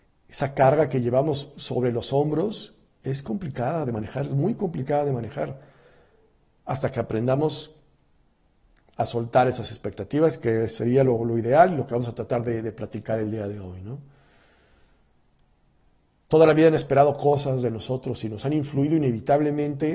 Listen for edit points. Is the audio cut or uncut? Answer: uncut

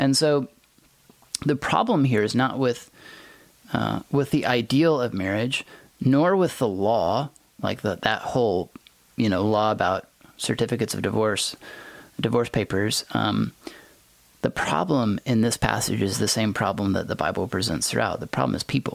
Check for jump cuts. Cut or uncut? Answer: uncut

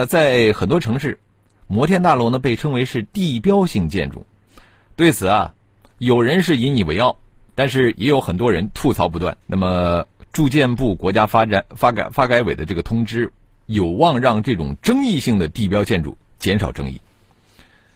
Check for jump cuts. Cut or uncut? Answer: cut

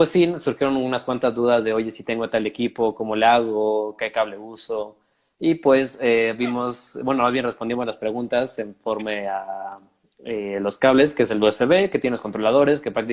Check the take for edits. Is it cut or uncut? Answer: uncut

